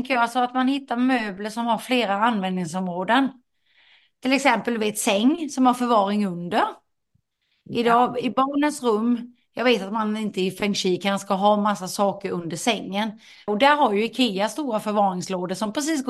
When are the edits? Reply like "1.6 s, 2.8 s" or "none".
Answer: 13.5 s